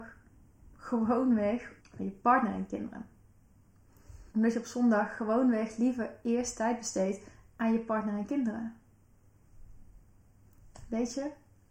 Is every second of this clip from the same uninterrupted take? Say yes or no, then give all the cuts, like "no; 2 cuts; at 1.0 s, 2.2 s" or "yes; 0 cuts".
no; 2 cuts; at 1.8 s, 4.3 s